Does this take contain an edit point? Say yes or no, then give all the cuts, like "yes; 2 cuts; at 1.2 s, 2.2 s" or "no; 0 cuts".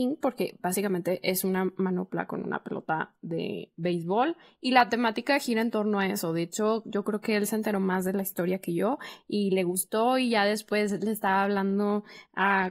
no; 0 cuts